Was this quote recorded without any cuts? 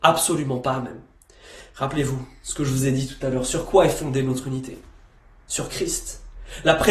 yes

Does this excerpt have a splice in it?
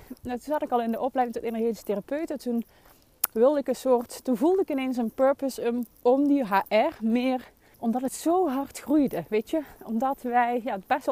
yes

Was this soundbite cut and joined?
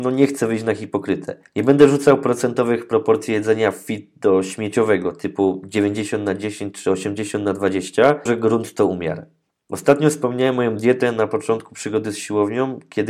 yes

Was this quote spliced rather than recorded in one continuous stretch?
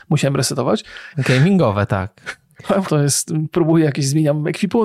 yes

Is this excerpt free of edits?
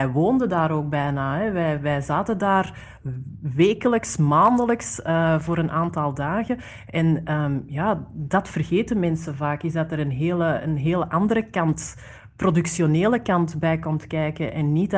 yes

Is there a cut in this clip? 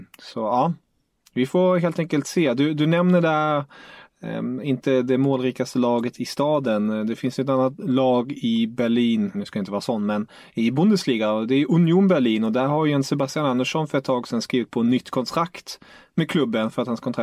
yes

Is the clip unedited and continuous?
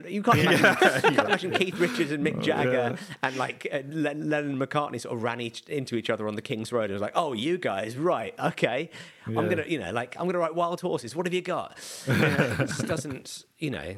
yes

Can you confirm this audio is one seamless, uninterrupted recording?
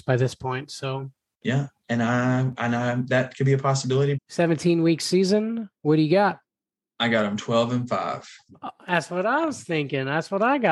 no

